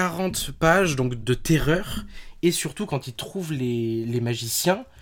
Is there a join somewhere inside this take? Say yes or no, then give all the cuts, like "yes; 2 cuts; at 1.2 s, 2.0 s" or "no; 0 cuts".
yes; 1 cut; at 1.2 s